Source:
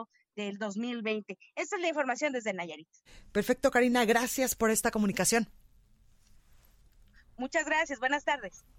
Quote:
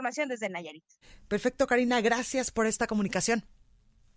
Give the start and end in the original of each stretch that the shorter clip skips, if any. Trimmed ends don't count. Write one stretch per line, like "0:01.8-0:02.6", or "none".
none